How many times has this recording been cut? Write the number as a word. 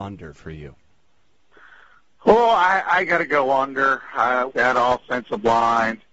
one